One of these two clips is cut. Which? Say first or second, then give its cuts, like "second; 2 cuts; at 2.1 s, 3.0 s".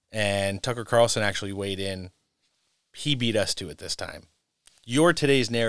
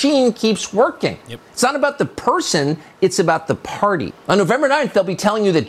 second; 1 cut; at 4.1 s